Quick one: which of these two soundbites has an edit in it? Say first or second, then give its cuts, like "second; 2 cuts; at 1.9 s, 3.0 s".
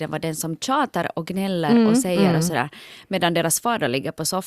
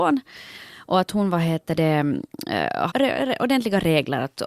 second; 1 cut; at 2.9 s